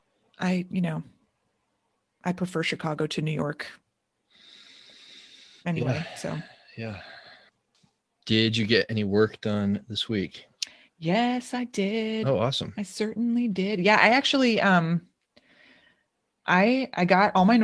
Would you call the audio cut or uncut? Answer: uncut